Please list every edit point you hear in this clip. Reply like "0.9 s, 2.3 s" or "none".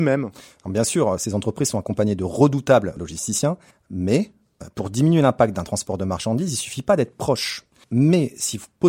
3.7 s, 7.8 s